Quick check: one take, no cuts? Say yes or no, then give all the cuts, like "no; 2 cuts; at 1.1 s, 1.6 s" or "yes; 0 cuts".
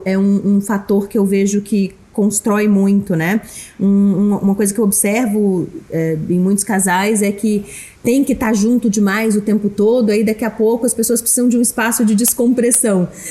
no; 1 cut; at 8.0 s